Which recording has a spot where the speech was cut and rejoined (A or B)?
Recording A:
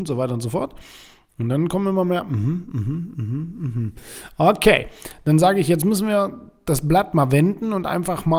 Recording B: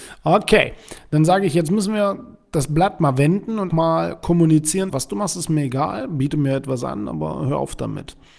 B